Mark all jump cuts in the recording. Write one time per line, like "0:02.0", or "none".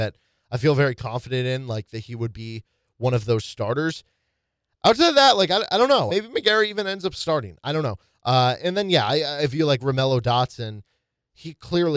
0:06.1